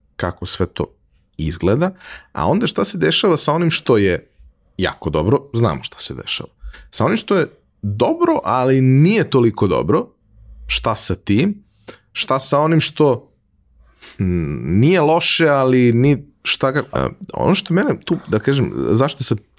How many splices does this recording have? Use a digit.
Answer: 1